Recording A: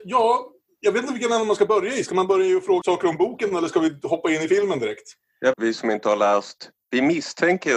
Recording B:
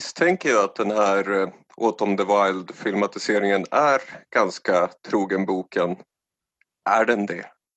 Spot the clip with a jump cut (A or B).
A